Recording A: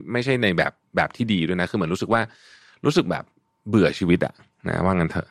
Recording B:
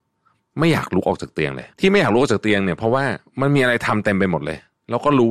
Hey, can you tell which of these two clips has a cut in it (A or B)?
B